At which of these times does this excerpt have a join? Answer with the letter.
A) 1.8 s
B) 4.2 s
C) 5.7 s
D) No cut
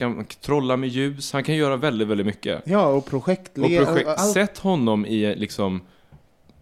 B